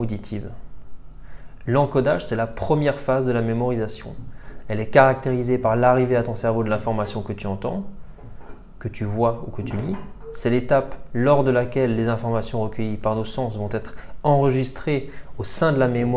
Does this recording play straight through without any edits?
yes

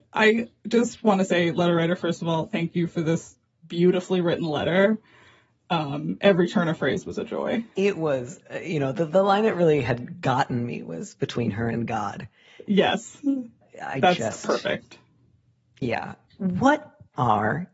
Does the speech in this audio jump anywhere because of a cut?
yes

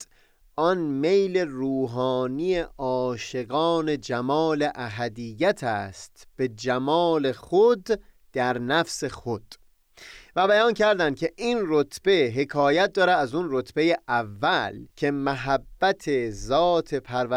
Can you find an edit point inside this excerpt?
yes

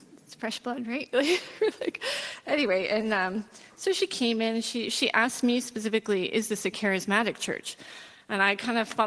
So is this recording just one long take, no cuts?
yes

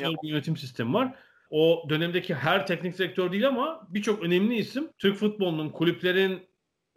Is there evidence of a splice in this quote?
yes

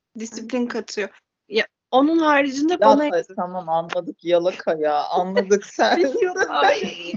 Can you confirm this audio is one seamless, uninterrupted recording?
no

